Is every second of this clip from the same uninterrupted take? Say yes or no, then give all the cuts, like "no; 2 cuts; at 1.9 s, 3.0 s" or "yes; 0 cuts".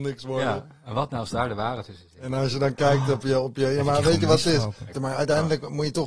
no; 1 cut; at 4.9 s